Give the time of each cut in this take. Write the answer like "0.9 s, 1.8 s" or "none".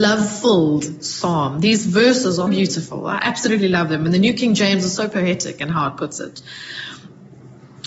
2.5 s